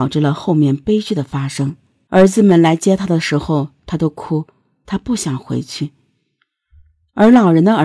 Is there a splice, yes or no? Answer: yes